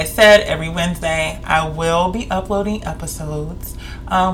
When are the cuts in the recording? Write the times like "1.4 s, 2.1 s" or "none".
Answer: none